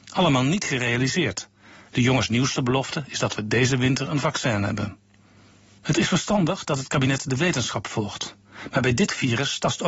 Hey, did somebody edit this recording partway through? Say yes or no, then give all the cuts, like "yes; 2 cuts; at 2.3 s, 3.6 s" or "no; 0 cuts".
no; 0 cuts